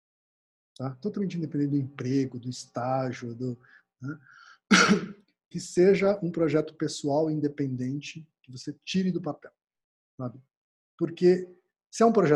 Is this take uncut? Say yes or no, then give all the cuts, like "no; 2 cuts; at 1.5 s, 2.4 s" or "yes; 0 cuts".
yes; 0 cuts